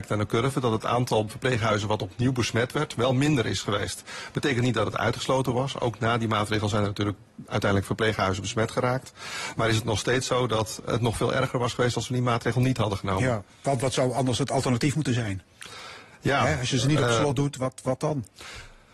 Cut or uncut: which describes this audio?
cut